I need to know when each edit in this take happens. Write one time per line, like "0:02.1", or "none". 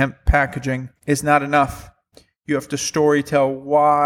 0:01.0